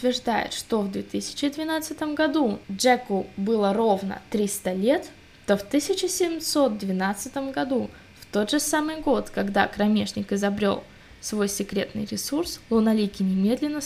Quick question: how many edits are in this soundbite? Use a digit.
1